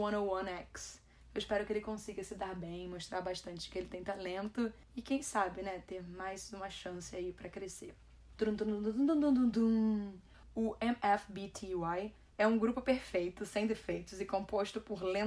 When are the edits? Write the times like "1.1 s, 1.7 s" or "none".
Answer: 8.3 s